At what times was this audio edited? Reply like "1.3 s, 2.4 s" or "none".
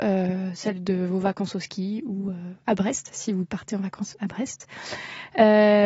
none